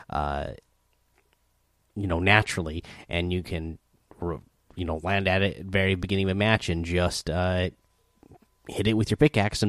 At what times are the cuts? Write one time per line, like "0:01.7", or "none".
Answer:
none